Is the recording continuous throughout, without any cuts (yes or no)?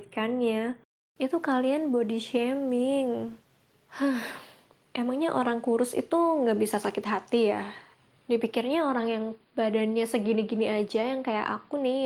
yes